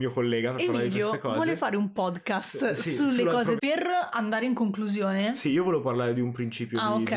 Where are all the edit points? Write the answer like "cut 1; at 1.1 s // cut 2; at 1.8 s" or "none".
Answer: cut 1; at 3.6 s